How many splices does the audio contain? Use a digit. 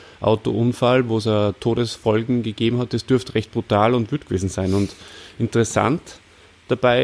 0